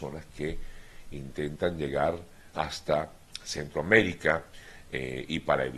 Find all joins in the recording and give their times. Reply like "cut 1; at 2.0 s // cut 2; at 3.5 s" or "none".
cut 1; at 2.5 s